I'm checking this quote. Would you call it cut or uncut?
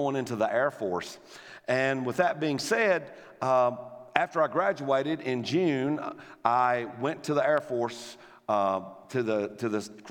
uncut